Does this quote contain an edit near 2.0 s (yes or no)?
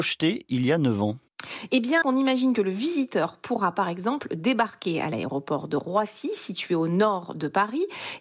yes